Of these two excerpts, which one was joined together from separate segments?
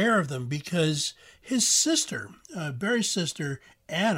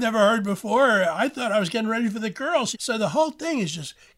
second; 1 cut; at 2.7 s

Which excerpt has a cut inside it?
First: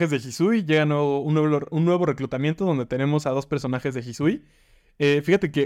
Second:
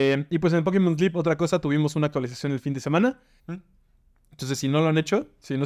second; 1 cut; at 3.4 s

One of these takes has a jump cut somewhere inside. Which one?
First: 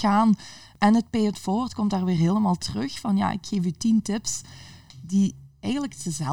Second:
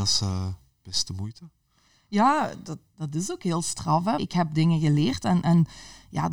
second; 1 cut; at 4.2 s

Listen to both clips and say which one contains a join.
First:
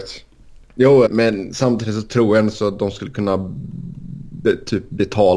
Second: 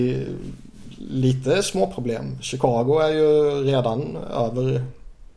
first; 1 cut; at 1.1 s

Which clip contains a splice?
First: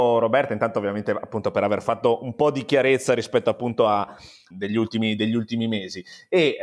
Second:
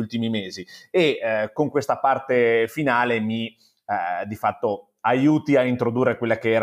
first; 1 cut; at 4.5 s

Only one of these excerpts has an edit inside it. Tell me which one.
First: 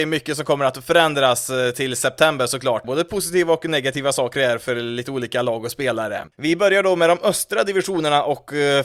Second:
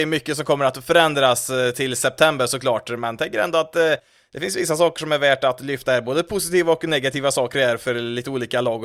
first; 2 cuts; at 2.8 s, 6.3 s

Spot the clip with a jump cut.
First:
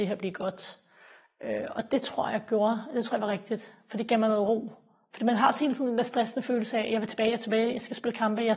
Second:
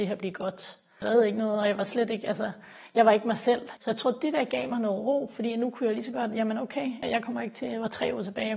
second; 3 cuts; at 1.0 s, 3.8 s, 7.0 s

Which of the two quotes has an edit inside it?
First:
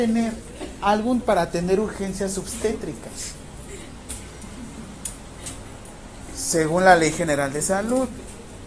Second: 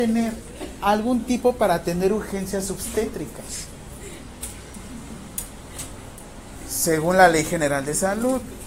first; 1 cut; at 1.2 s

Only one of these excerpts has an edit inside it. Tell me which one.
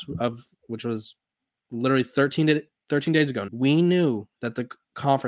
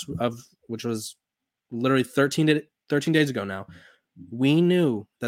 first; 1 cut; at 3.5 s

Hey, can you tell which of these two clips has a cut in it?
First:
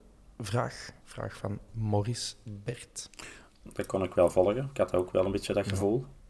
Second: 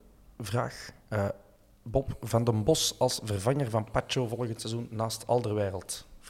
first; 2 cuts; at 1.0 s, 3.6 s

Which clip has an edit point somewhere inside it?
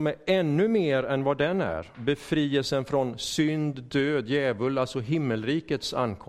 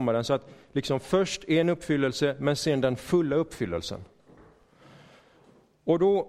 first; 1 cut; at 1.9 s

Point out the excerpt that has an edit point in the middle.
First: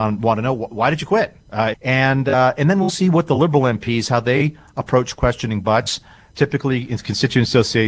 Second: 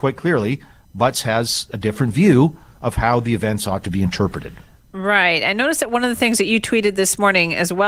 first; 2 cuts; at 1.7 s, 6.3 s

